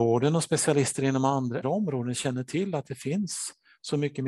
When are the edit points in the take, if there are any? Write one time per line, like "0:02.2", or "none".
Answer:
0:01.6